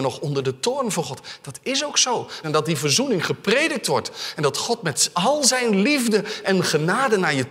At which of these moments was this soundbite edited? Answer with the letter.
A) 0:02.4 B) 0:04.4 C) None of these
A